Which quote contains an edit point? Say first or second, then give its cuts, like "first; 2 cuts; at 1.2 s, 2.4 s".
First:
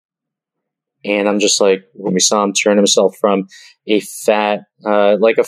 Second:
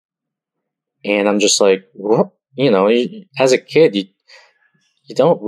first; 1 cut; at 2.1 s